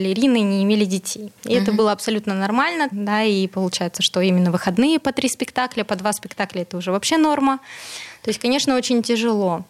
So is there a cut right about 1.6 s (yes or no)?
no